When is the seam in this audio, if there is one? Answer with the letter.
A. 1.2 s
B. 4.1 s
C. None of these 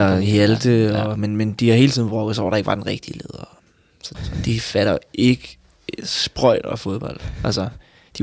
B